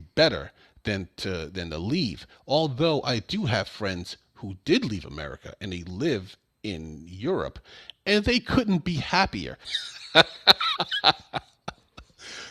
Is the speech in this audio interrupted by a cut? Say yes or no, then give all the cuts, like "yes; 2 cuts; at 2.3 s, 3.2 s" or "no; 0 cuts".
yes; 1 cut; at 9.6 s